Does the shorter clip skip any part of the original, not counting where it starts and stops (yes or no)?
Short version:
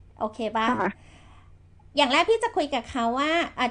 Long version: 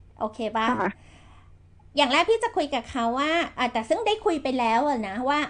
no